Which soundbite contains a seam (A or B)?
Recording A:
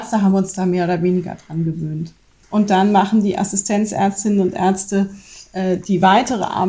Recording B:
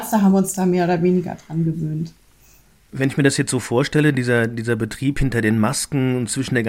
A